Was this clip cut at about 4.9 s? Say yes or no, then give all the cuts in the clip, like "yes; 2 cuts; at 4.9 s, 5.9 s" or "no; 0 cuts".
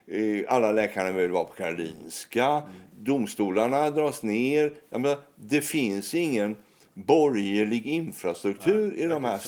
no; 0 cuts